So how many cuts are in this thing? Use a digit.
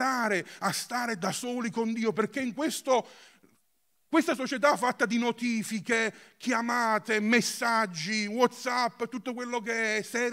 0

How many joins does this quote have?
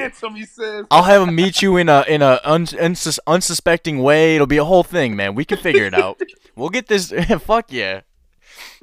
0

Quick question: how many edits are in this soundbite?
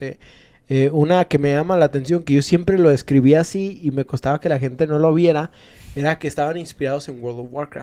0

